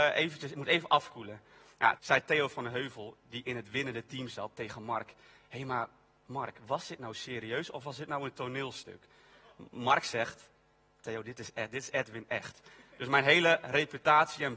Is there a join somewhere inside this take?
yes; 1 cut; at 2.0 s

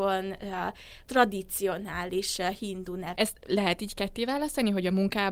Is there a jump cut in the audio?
yes; 1 cut; at 3.2 s

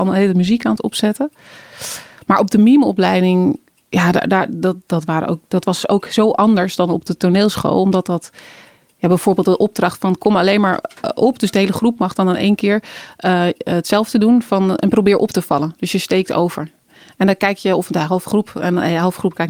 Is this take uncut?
yes; 0 cuts

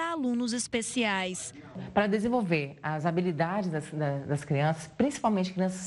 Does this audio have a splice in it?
no; 0 cuts

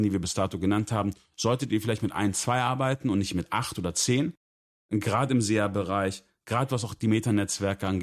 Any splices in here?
no; 0 cuts

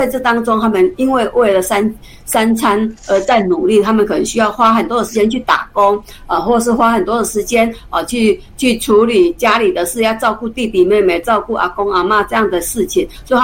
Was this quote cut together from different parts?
no; 0 cuts

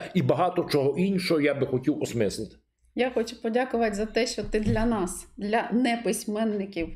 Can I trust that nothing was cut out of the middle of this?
yes; 0 cuts

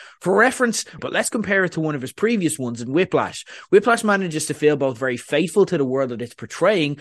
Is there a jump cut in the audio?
yes; 1 cut; at 1.0 s

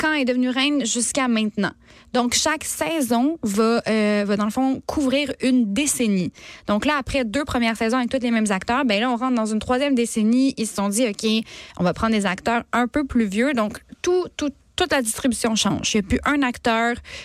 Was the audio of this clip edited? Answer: no; 0 cuts

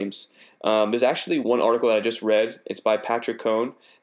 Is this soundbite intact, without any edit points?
no; 1 cut; at 1.4 s

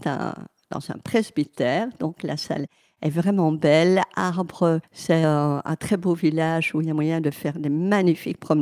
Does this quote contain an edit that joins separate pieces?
no; 0 cuts

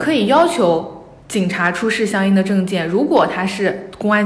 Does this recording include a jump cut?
no; 0 cuts

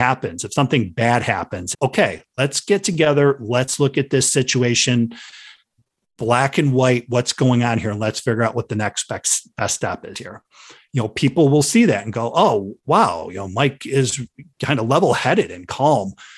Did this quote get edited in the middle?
yes; 1 cut; at 1.7 s

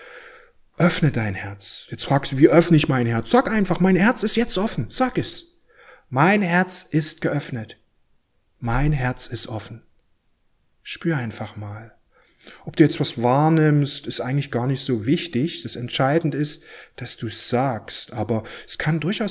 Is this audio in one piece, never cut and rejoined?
yes; 0 cuts

